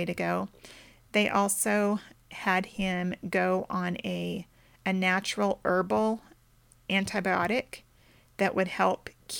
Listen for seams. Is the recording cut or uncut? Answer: uncut